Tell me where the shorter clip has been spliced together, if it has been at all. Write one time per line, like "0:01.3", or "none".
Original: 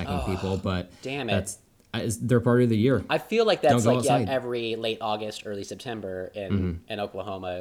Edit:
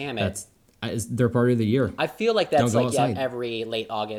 none